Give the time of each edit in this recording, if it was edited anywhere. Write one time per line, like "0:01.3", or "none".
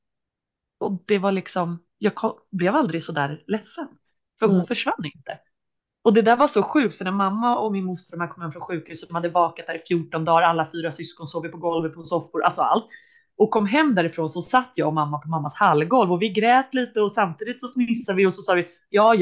none